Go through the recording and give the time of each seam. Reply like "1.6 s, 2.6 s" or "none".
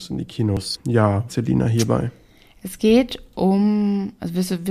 1.3 s